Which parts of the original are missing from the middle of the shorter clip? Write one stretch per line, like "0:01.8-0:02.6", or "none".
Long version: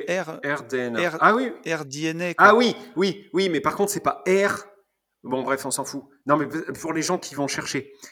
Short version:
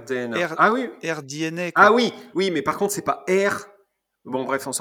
0:02.9-0:03.3